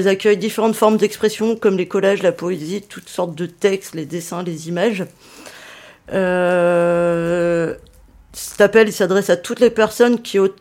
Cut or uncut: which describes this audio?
uncut